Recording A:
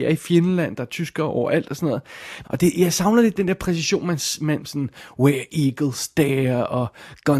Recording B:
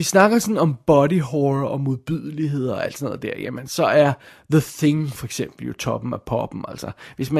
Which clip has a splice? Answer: A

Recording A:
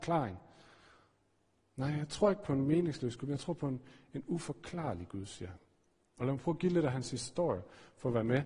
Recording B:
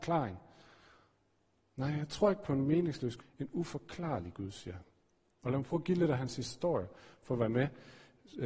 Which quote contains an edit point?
B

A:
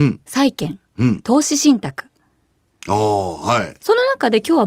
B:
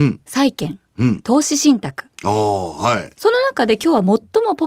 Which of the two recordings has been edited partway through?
B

